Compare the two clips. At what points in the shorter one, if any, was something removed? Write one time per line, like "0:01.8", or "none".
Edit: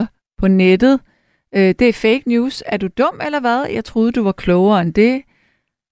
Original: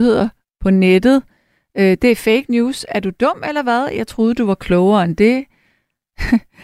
none